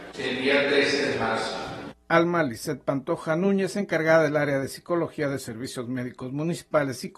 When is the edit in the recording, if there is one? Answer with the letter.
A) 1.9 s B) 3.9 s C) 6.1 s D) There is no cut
A